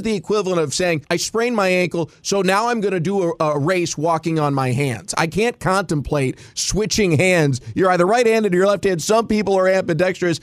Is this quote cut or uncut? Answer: uncut